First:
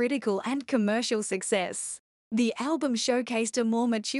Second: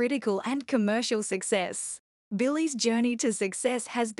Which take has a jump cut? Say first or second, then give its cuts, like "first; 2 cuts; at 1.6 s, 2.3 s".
second; 1 cut; at 2.1 s